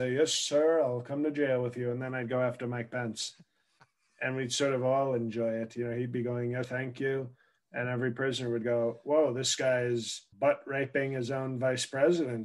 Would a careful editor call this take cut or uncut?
cut